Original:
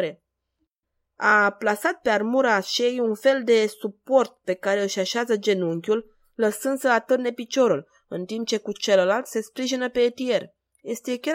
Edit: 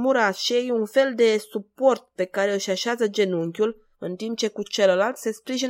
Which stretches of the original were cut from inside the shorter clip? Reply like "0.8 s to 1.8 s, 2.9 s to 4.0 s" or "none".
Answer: 6.2 s to 8.0 s